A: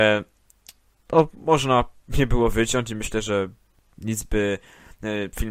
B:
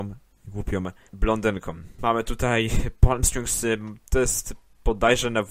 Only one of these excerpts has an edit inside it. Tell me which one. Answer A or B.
B